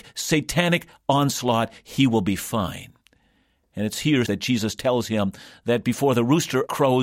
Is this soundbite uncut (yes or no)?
no